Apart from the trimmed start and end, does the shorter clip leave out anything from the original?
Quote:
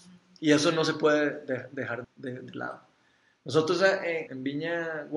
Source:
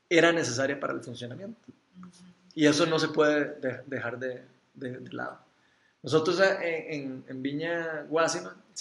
yes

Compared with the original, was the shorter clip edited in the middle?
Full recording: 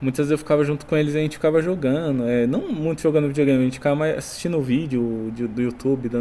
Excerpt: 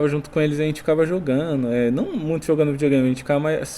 no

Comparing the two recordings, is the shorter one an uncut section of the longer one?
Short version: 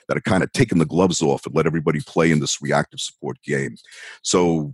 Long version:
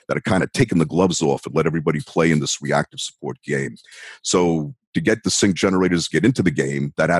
yes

